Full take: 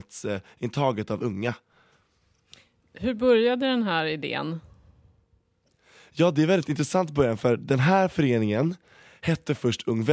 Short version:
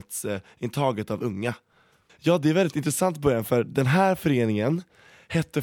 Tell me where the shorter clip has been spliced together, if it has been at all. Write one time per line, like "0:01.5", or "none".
0:02.1